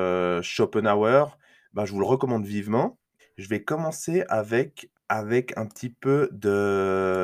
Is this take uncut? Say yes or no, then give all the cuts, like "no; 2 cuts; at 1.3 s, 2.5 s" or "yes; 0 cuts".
no; 2 cuts; at 3.2 s, 4.9 s